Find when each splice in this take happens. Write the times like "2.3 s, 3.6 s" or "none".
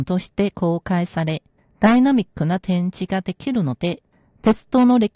none